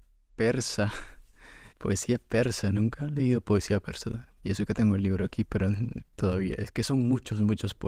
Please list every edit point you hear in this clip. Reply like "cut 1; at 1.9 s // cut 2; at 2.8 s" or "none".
cut 1; at 1.7 s